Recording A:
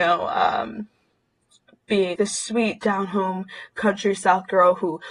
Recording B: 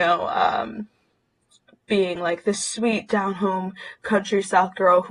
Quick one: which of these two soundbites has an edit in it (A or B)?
A